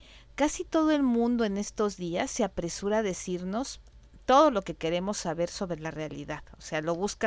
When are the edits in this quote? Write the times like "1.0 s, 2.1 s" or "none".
none